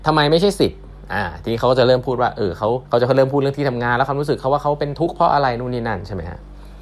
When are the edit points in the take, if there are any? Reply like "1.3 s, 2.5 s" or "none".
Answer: 2.9 s